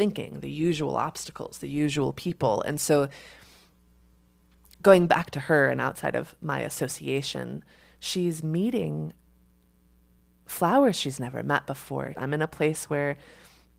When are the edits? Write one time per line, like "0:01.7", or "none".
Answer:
0:12.1